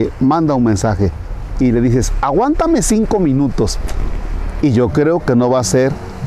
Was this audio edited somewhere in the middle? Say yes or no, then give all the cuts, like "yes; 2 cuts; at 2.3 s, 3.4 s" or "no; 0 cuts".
yes; 2 cuts; at 1.6 s, 4.6 s